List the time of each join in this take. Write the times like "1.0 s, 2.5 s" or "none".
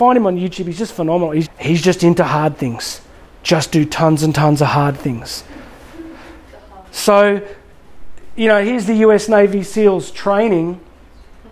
1.4 s